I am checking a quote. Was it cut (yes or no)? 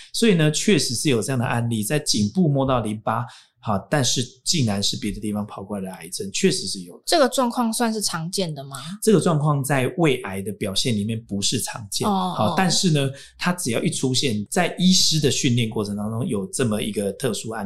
no